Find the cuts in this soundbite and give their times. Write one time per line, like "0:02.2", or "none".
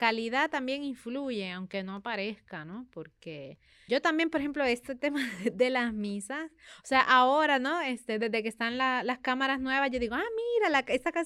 0:03.9